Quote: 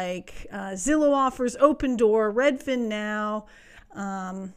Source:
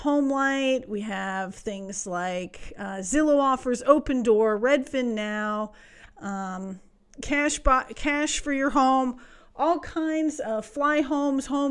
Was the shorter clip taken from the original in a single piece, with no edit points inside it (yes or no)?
yes